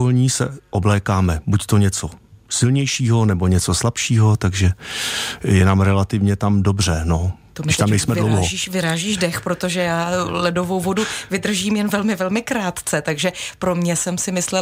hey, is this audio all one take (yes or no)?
yes